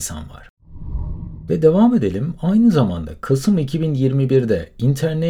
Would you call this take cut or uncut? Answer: uncut